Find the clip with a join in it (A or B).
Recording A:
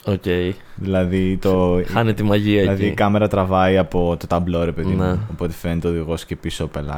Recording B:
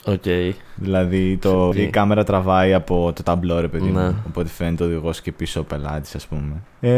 B